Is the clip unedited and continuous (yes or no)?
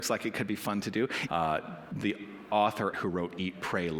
no